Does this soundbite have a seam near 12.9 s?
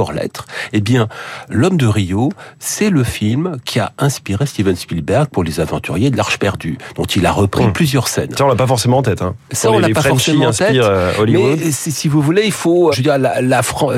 yes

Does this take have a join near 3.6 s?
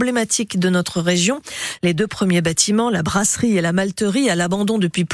no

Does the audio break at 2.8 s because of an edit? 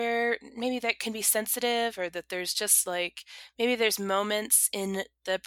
no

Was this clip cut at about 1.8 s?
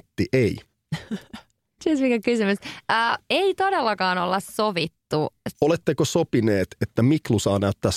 yes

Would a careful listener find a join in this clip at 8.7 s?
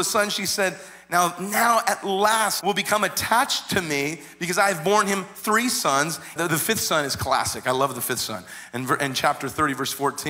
no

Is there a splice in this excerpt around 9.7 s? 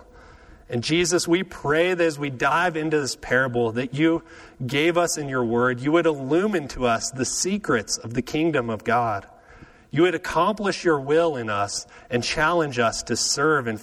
no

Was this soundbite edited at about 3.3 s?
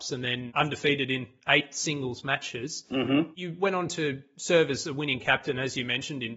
no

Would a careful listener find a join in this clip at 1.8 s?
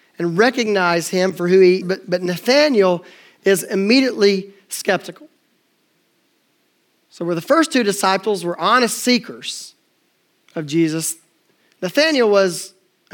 yes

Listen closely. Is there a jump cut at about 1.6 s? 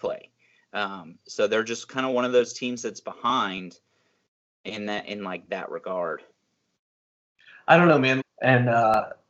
no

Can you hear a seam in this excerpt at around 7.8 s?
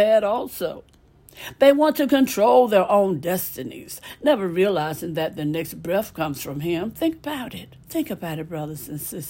yes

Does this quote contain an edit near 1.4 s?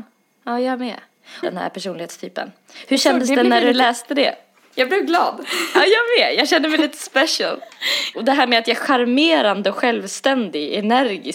yes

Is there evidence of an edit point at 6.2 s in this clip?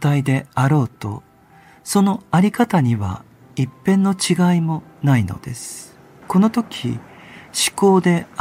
yes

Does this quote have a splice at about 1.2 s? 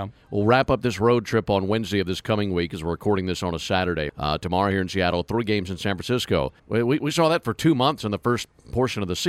no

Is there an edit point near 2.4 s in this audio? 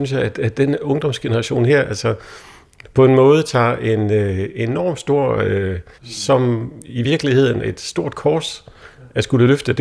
no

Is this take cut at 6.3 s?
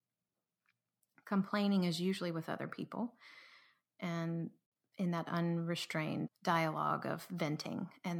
yes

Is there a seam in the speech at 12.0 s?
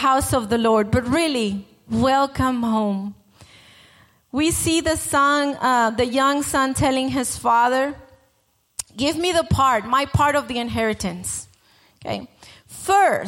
no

